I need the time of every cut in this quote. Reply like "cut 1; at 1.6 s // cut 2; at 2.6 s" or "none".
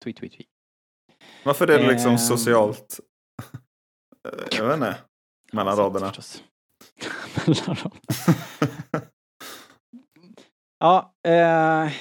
cut 1; at 5.4 s